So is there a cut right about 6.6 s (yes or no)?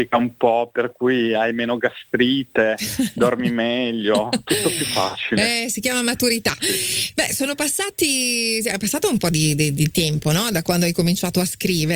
yes